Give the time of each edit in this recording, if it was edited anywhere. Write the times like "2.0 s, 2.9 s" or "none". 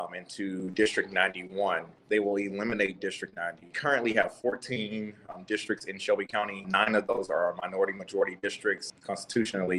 none